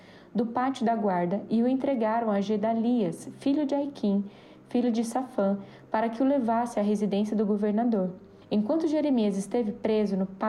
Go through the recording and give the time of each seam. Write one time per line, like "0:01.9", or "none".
0:08.4